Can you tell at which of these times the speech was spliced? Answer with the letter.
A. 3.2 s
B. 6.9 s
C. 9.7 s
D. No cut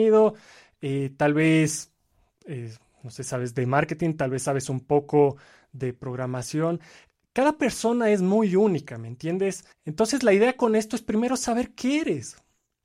C